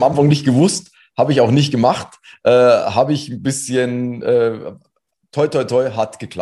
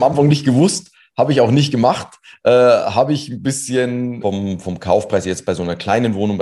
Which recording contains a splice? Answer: second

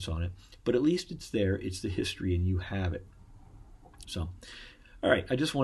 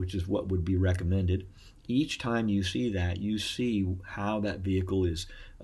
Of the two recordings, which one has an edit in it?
first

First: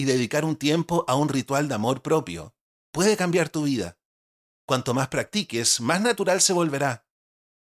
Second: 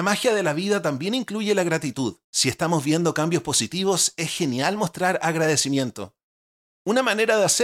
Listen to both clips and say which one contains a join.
second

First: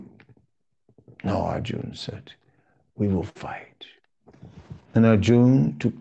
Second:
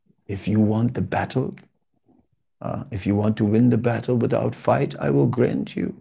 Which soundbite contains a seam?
first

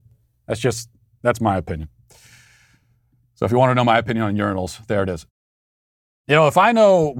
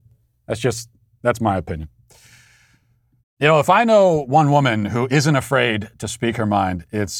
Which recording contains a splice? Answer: second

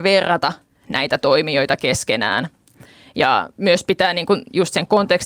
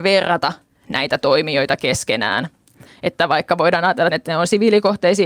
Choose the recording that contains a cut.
second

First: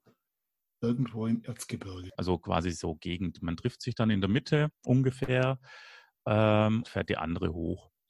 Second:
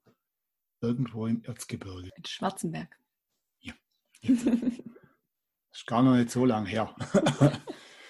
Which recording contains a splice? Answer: first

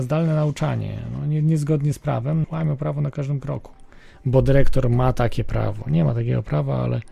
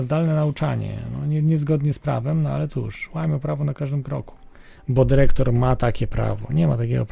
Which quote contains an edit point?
first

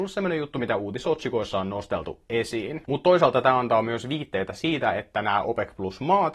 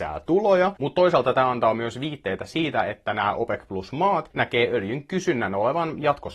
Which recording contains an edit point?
first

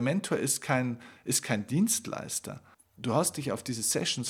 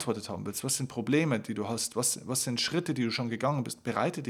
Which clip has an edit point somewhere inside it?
first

